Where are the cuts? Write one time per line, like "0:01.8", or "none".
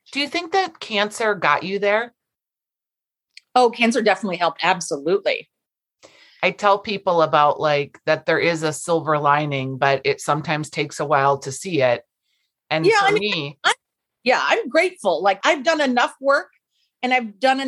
0:15.4